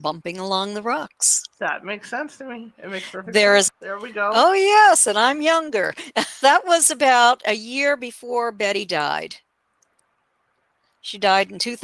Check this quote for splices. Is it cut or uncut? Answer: cut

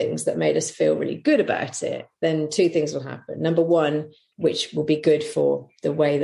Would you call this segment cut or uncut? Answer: cut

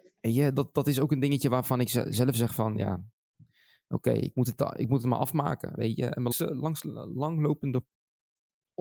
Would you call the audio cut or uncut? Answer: cut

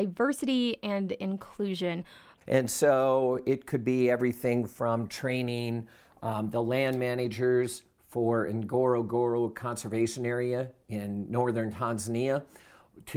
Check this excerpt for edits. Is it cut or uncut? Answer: cut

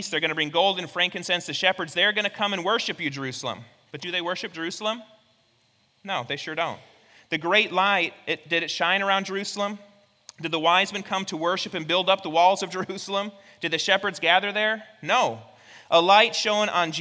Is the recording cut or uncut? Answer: uncut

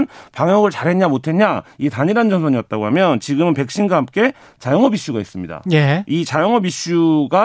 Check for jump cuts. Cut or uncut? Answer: uncut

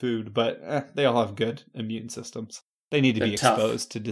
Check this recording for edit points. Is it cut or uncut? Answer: uncut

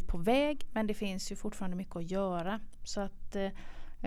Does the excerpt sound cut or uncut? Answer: uncut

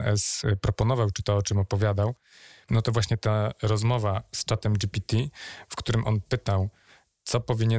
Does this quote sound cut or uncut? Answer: uncut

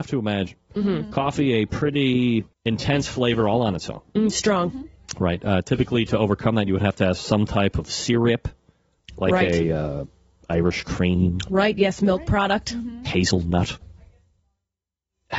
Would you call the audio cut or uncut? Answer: cut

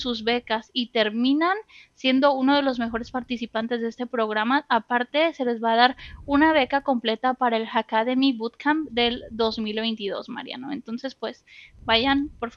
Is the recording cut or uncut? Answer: uncut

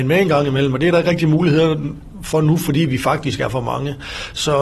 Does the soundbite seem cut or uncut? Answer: uncut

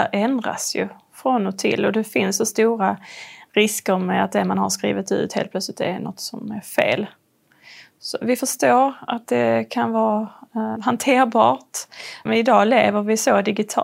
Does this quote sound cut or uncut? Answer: cut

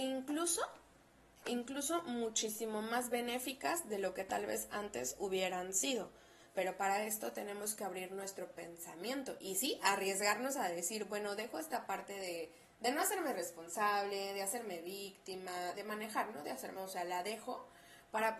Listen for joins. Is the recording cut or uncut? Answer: cut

